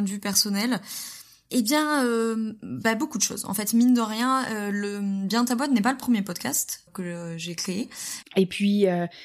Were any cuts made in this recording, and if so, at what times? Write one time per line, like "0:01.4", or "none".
0:06.9
0:08.2